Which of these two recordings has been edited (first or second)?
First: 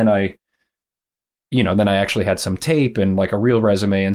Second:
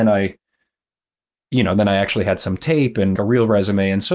second